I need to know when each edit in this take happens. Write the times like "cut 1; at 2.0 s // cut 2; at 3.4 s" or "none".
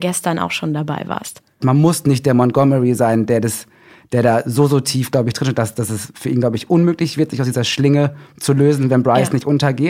cut 1; at 1.6 s